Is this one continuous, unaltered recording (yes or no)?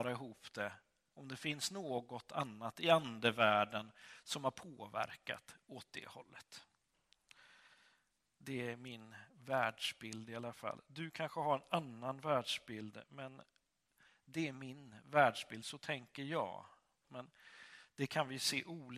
no